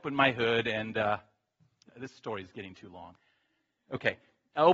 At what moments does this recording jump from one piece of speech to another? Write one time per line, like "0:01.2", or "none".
0:01.9